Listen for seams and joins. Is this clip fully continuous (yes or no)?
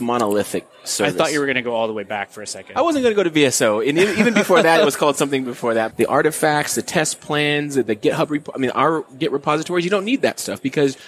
no